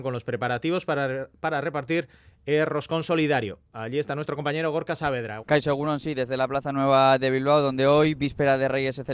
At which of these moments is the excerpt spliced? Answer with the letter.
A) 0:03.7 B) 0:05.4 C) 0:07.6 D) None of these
B